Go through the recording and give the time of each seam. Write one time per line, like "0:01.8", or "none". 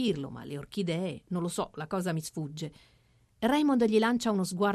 none